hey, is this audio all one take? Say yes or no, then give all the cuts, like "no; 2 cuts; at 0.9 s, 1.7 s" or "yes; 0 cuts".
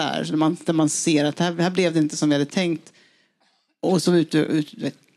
yes; 0 cuts